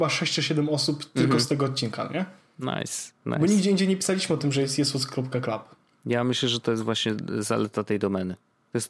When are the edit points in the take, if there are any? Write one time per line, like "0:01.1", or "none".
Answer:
none